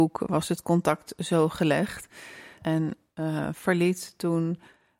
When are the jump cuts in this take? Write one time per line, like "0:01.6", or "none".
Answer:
0:02.6